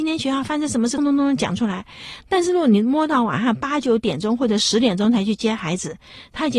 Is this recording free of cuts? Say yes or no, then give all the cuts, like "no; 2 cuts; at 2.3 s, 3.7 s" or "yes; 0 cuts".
no; 1 cut; at 1.0 s